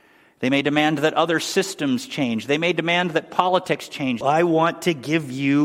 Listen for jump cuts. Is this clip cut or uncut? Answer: cut